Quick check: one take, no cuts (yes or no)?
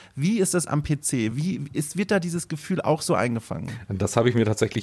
yes